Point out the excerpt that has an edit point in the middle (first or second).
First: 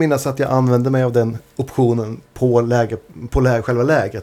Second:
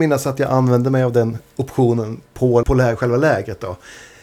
second